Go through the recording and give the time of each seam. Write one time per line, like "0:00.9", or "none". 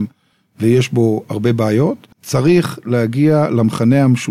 0:02.1